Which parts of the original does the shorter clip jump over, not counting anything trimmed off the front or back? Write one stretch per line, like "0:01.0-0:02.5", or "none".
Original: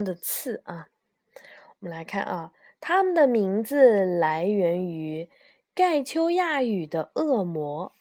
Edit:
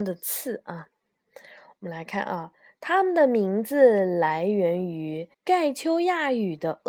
0:05.3-0:05.6